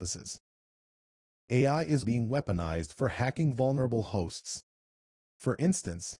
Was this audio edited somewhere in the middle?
yes; 1 cut; at 2.0 s

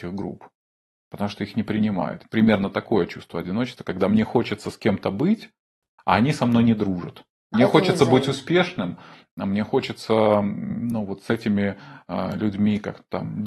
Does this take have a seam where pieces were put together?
yes; 1 cut; at 7.5 s

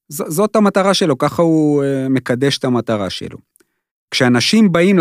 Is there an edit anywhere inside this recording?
no; 0 cuts

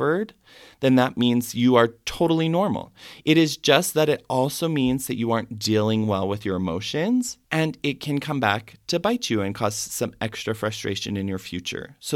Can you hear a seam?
yes; 1 cut; at 7.4 s

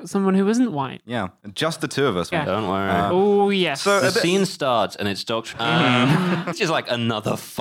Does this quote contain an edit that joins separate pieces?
yes; 3 cuts; at 2.3 s, 5.5 s, 6.5 s

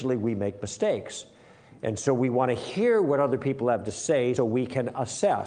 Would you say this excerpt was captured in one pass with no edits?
no; 1 cut; at 4.4 s

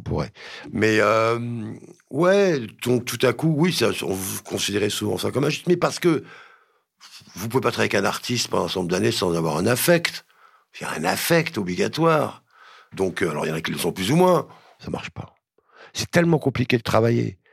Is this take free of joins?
no; 1 cut; at 14.8 s

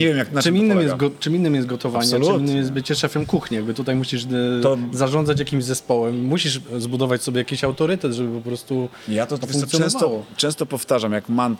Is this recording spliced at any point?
no; 0 cuts

